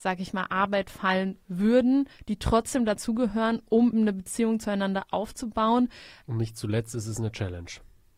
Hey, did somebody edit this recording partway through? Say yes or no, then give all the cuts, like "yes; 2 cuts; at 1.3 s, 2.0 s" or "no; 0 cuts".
yes; 2 cuts; at 3.9 s, 6.2 s